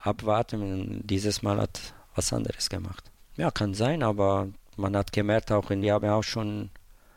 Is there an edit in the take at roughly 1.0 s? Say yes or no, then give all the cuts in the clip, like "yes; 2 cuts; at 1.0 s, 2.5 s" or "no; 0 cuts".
no; 2 cuts; at 3.2 s, 5.8 s